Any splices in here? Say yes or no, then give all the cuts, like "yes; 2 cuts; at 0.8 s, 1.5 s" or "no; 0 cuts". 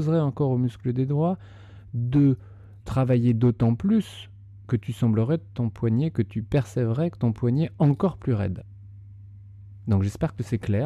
yes; 1 cut; at 2.8 s